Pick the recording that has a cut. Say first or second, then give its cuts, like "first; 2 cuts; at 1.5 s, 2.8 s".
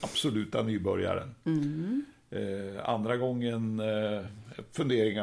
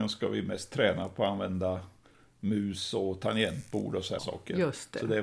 second; 1 cut; at 4.2 s